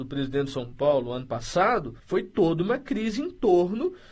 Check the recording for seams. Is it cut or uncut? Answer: cut